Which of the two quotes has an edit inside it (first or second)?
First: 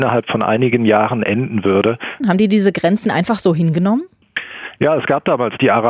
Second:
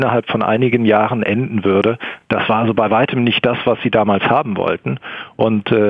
first